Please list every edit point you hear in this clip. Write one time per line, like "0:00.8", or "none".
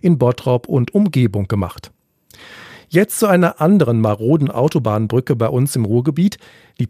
none